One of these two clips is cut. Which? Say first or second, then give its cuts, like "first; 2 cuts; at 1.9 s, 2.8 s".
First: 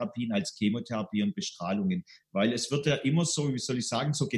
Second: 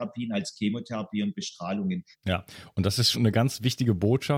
second; 2 cuts; at 2.1 s, 3.1 s